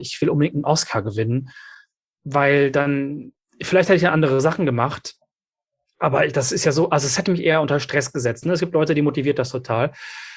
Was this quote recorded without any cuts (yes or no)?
no